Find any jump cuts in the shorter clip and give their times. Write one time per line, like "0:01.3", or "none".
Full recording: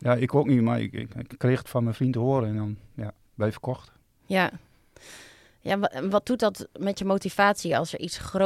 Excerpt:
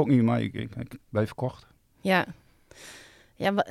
0:01.0

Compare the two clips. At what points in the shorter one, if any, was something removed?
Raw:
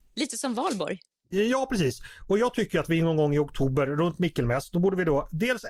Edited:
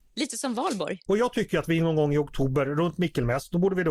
0:01.1

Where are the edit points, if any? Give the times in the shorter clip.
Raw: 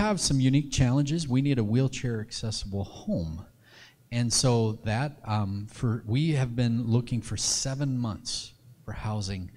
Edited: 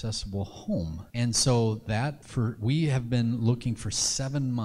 0:01.1
0:02.2

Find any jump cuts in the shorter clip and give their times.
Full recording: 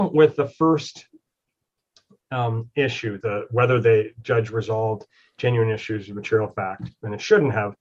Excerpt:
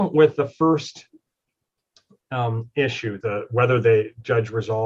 none

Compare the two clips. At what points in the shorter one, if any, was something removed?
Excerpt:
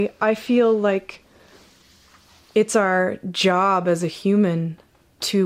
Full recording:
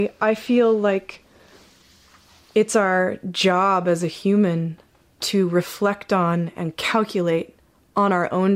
none

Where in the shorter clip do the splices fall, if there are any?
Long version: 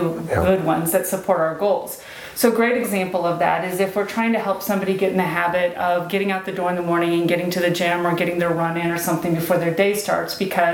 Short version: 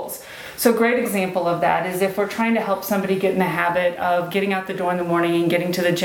none

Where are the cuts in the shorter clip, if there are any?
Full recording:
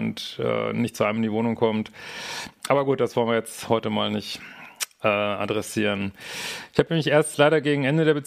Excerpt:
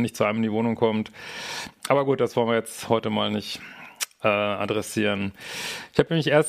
none

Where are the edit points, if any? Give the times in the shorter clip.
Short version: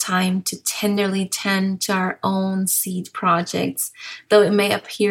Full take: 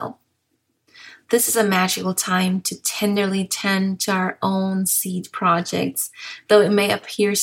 none

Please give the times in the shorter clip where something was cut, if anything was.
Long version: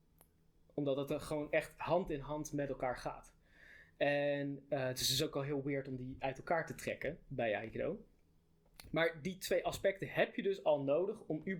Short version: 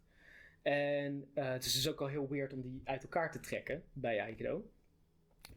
none

